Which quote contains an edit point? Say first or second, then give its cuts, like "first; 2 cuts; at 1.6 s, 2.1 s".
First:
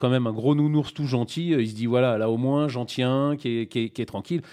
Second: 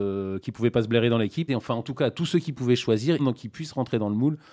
second; 2 cuts; at 1.5 s, 3.2 s